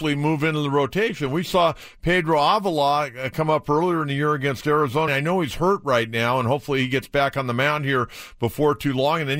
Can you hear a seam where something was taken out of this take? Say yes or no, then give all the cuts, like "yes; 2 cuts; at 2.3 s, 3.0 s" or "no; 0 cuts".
yes; 1 cut; at 5.1 s